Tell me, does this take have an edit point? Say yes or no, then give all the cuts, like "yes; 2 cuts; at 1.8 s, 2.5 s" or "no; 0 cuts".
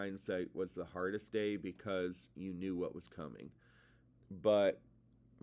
yes; 1 cut; at 4.2 s